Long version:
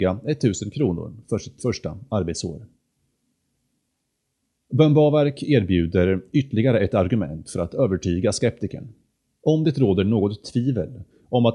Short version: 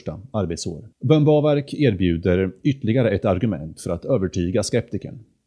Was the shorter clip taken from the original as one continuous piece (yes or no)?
no